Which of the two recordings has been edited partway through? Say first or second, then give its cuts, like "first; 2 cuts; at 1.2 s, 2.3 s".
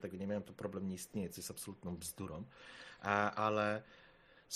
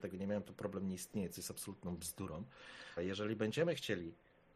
second; 1 cut; at 3.0 s